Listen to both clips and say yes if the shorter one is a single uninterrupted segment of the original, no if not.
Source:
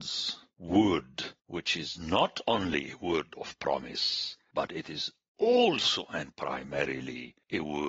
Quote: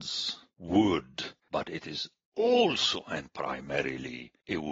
no